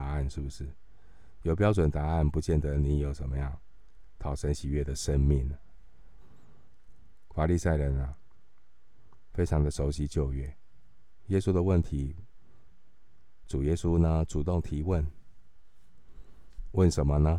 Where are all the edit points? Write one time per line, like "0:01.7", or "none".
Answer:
0:06.2
0:12.7

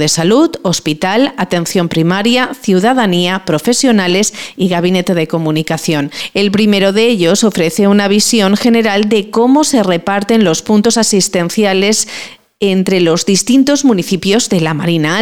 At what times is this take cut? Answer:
none

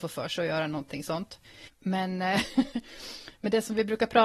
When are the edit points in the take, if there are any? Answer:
0:01.7

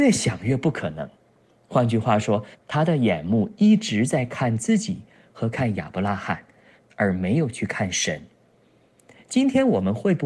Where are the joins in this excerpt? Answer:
0:02.5
0:06.8

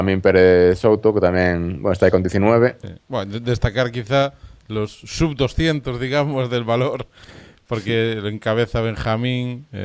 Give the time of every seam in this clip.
0:02.8

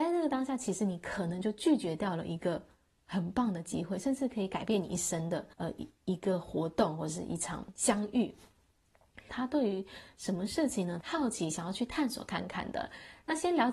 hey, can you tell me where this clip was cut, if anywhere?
0:05.5
0:09.3
0:11.0

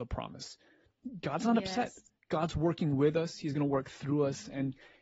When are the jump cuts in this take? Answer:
none

